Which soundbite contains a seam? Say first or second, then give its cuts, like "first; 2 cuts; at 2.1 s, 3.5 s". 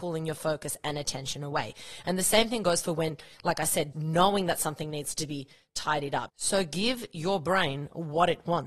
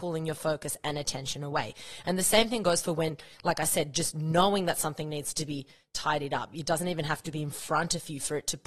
first; 2 cuts; at 3.9 s, 6.3 s